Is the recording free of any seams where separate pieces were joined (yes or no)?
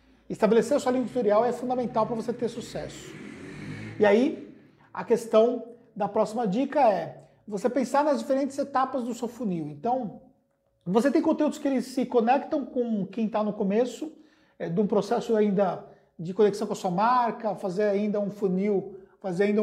yes